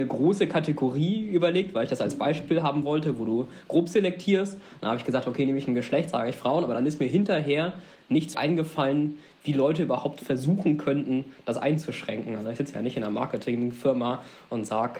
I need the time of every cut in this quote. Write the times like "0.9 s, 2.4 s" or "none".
8.3 s

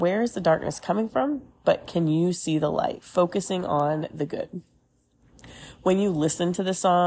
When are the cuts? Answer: none

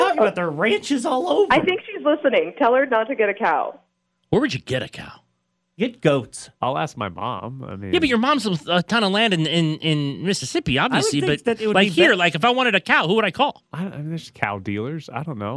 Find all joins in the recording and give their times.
none

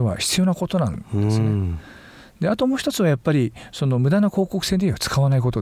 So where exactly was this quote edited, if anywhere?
none

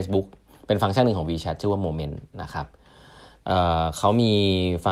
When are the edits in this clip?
none

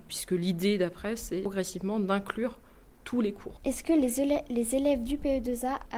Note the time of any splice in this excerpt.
3.6 s

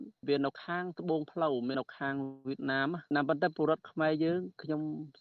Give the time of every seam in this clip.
1.7 s

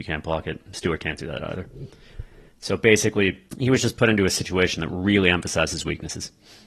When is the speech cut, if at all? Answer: 3.5 s

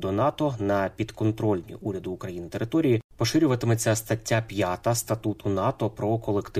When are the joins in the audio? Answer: none

